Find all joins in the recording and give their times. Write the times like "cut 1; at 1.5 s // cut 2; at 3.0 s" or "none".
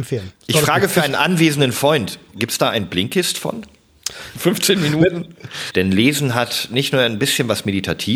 cut 1; at 4.3 s // cut 2; at 5.7 s